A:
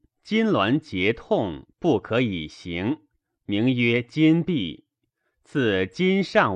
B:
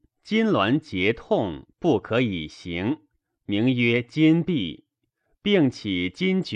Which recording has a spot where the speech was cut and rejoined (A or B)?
B